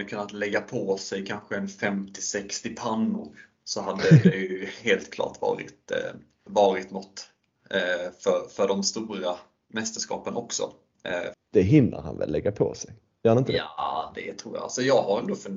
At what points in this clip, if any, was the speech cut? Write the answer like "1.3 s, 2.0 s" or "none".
6.5 s, 11.3 s